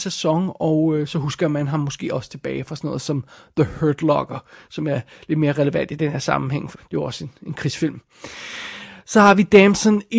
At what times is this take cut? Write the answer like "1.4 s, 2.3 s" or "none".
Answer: 6.7 s